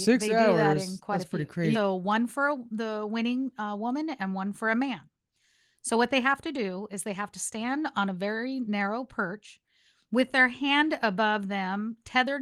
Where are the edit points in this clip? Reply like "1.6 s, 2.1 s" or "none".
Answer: 1.7 s